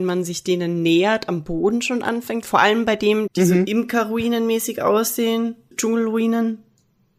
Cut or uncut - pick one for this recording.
cut